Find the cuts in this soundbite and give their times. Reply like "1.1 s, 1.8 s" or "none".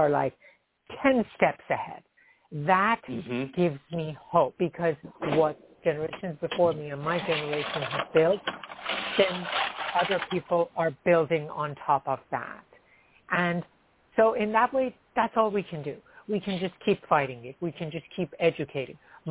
none

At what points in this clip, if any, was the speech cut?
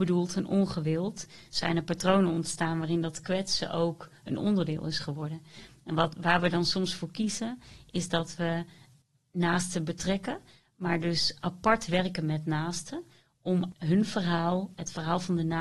none

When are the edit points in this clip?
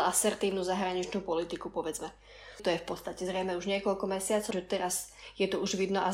2.6 s, 4.5 s

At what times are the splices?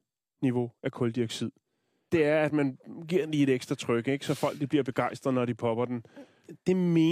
2.1 s

